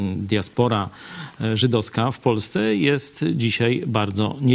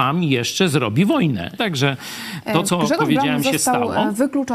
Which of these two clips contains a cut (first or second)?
second